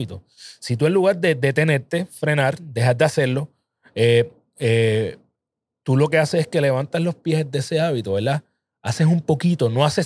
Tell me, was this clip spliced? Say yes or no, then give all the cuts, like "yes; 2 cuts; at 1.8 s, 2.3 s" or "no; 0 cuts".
no; 0 cuts